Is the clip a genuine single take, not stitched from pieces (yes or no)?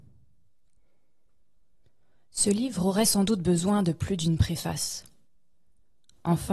yes